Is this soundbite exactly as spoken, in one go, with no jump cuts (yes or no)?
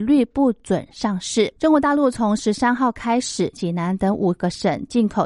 no